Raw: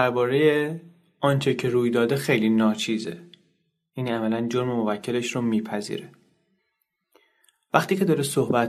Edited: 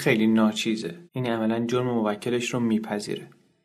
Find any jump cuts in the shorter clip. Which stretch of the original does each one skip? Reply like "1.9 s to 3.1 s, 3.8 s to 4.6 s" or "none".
3.3 s to 3.9 s